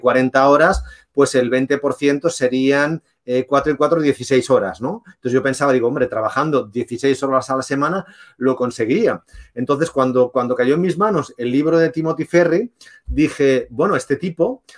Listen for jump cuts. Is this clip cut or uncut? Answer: uncut